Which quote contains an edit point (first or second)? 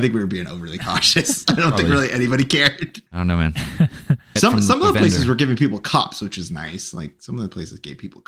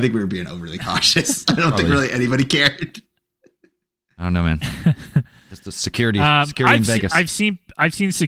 first